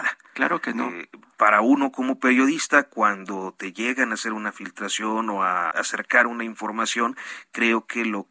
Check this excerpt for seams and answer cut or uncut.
cut